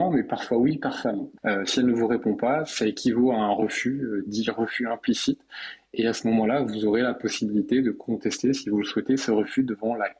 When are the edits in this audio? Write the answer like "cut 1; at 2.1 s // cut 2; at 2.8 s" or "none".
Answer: cut 1; at 1.4 s